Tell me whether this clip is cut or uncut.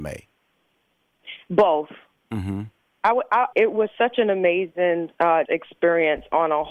cut